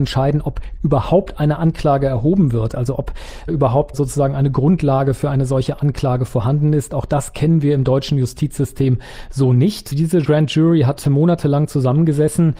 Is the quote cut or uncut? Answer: uncut